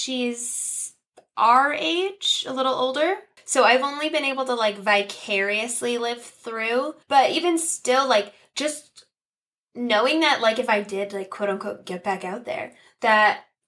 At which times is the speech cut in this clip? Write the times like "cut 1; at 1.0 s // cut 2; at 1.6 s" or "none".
cut 1; at 3.4 s // cut 2; at 7.0 s